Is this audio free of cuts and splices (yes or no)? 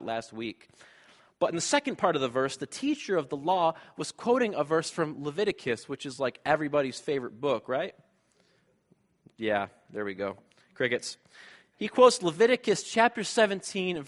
yes